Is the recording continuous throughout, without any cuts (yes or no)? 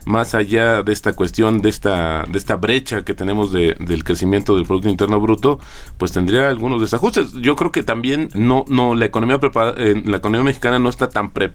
no